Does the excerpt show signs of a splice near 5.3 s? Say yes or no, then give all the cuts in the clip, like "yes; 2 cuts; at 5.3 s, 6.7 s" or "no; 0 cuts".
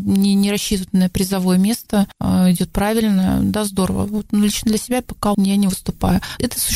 yes; 1 cut; at 5.3 s